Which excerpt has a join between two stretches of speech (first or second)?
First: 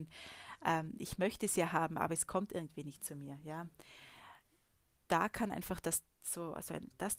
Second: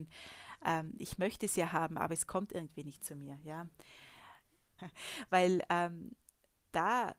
second